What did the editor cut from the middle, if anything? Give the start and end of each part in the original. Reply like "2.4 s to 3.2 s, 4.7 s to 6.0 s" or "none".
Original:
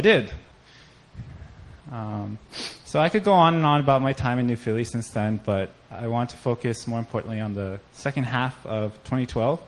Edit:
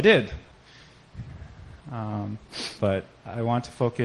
2.8 s to 5.4 s